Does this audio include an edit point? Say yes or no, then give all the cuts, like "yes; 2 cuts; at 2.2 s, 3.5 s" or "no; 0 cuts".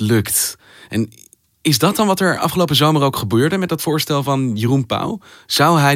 no; 0 cuts